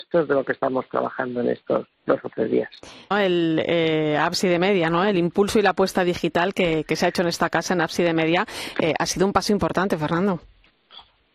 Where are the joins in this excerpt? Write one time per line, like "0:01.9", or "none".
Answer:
0:03.1

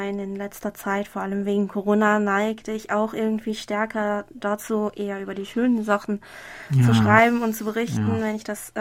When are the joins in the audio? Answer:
none

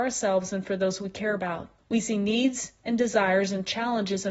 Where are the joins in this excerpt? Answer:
0:01.8

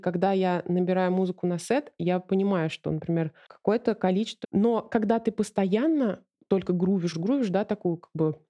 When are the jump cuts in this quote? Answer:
0:04.4
0:07.1

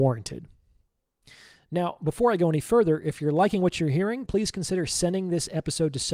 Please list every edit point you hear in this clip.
0:04.3

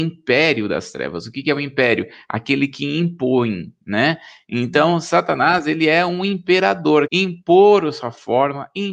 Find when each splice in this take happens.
0:07.0

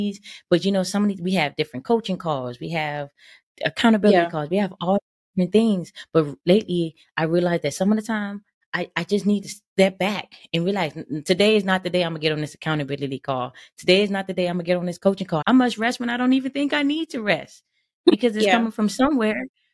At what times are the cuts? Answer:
0:15.4

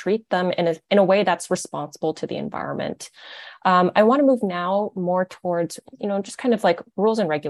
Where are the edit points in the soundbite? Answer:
none

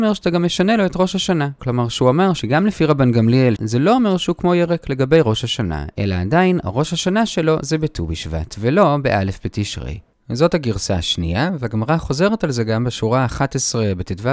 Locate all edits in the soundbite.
0:01.6
0:03.6

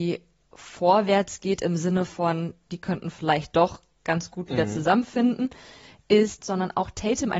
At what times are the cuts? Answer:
0:06.4

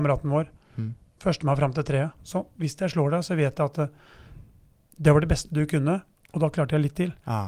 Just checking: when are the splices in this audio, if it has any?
0:02.2

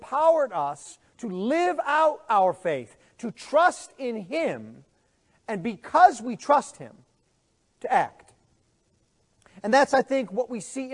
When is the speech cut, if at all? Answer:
none

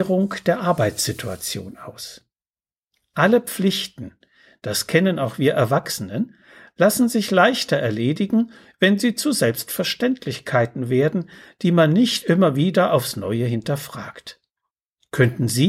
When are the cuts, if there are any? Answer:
none

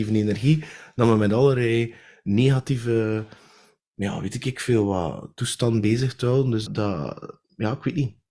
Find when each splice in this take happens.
0:06.7

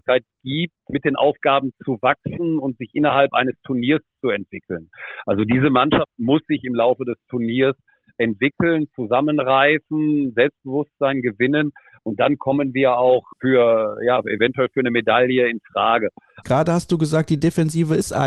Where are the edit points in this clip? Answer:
0:16.4

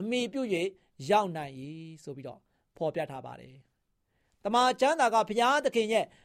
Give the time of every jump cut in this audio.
none

